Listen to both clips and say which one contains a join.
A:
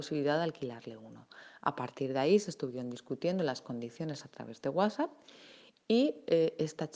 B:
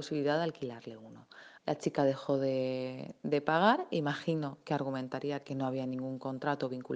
B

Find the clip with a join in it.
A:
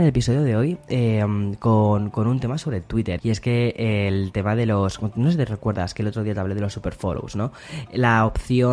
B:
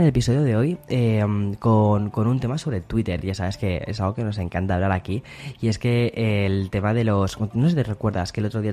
A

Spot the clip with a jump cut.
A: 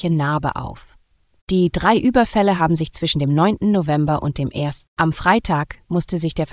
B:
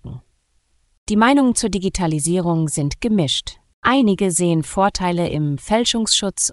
A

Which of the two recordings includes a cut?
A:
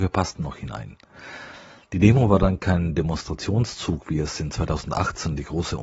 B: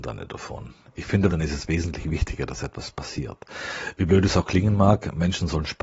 B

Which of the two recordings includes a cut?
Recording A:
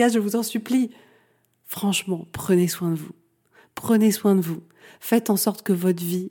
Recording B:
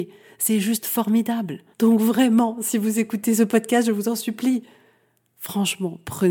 B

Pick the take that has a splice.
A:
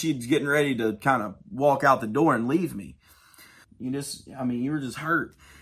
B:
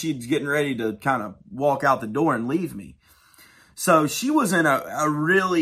A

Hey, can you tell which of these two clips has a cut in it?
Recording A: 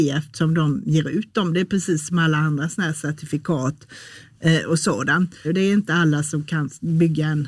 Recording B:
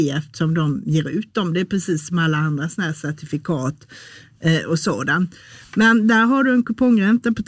A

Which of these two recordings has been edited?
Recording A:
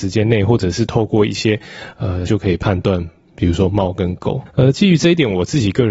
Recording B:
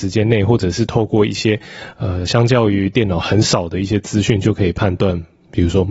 A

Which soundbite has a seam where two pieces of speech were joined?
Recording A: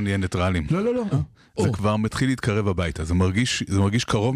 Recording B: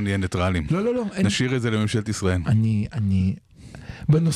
A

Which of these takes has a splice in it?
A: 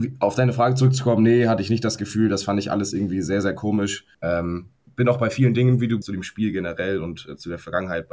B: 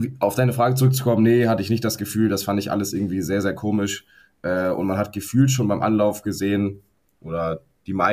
A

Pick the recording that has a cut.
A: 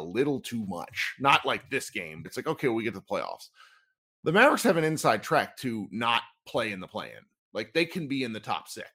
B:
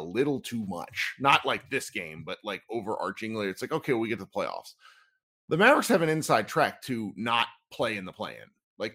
A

